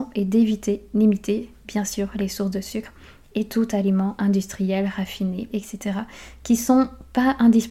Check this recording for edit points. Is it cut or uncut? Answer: cut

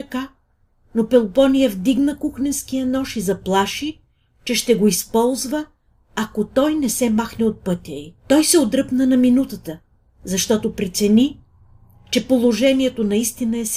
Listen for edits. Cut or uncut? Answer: cut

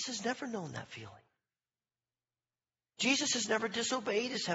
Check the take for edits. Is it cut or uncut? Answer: cut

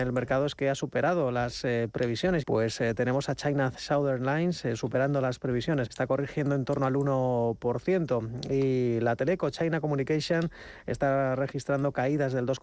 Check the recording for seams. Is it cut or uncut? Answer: cut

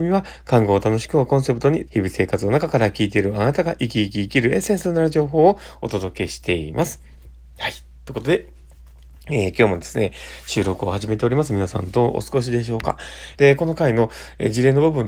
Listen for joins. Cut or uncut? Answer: cut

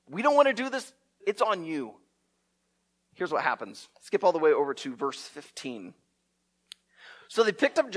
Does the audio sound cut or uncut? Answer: cut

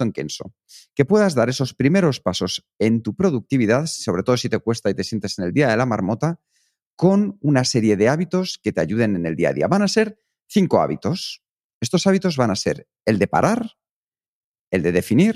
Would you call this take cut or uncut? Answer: uncut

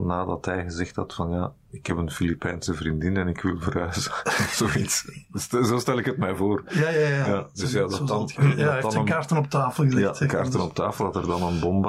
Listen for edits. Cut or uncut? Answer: uncut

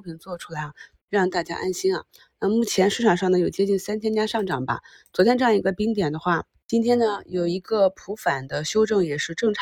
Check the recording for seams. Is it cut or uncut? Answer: uncut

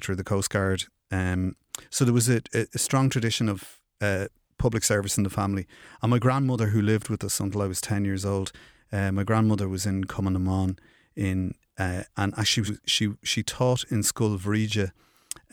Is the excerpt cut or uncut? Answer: cut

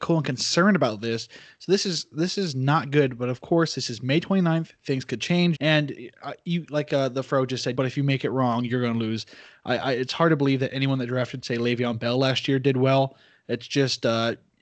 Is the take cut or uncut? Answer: cut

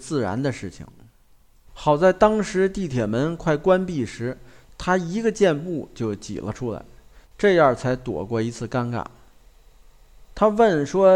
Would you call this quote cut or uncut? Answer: cut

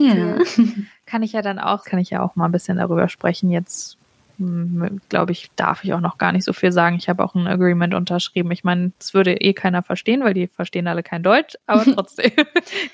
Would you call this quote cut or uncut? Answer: cut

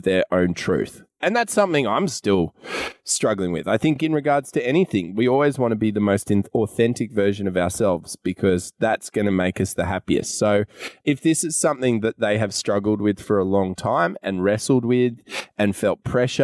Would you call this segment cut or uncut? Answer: uncut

